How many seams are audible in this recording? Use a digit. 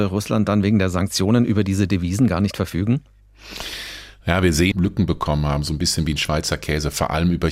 1